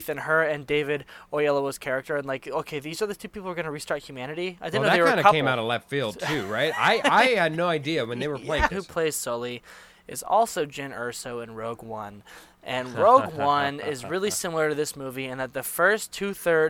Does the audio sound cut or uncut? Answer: cut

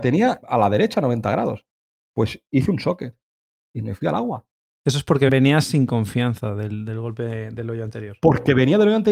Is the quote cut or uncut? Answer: uncut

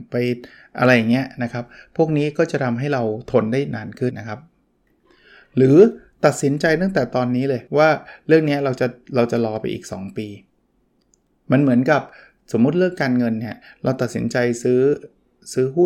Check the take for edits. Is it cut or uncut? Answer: cut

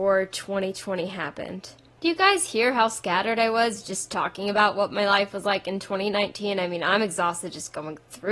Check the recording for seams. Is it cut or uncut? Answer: uncut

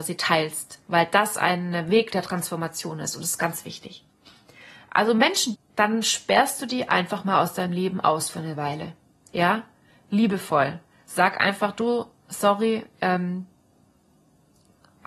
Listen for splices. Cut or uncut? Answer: cut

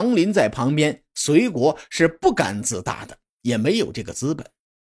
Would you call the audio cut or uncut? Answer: uncut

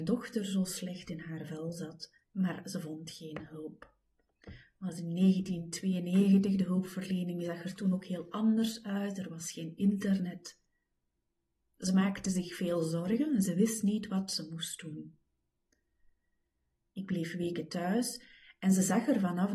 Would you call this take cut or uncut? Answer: cut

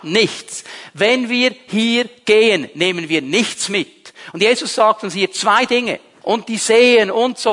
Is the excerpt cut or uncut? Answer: cut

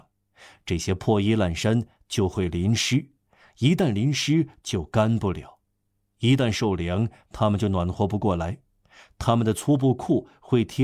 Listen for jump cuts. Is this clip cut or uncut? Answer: uncut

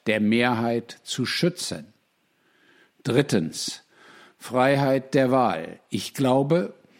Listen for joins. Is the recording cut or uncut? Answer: uncut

